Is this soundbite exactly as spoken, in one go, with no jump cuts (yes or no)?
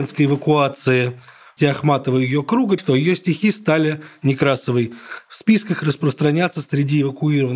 no